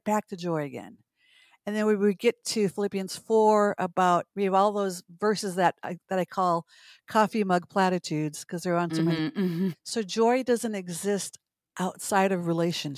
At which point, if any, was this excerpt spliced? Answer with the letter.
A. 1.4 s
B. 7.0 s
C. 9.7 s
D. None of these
C